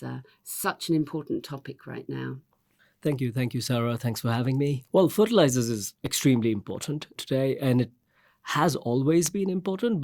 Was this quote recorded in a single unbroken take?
yes; 0 cuts

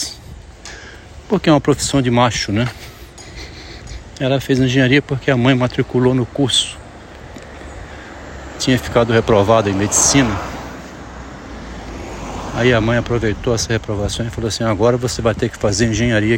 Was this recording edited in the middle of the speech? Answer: no; 0 cuts

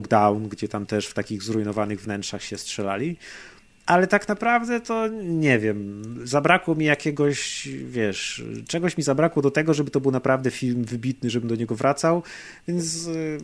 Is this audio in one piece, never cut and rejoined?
yes; 0 cuts

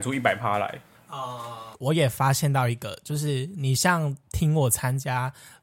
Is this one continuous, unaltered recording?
no; 1 cut; at 1.7 s

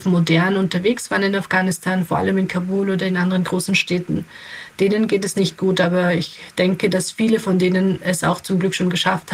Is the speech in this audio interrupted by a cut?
no; 0 cuts

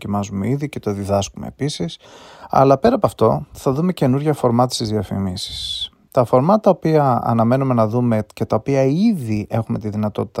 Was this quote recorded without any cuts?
yes; 0 cuts

